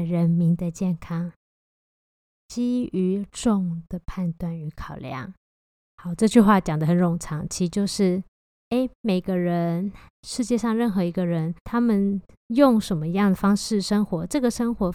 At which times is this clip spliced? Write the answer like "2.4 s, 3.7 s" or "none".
3.3 s, 5.8 s, 11.6 s